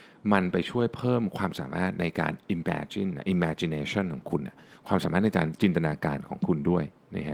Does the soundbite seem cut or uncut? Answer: uncut